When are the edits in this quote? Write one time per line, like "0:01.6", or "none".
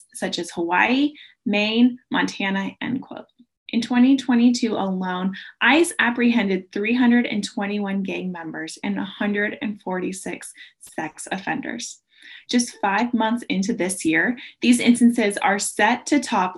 0:02.8